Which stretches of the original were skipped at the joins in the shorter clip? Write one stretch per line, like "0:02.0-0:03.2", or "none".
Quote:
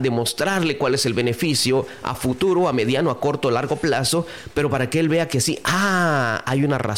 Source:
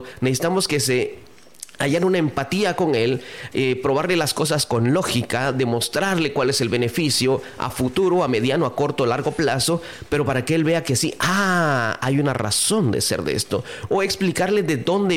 none